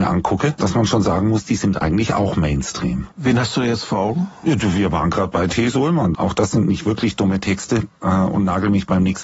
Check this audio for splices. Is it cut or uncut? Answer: cut